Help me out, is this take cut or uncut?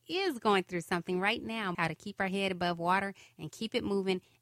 cut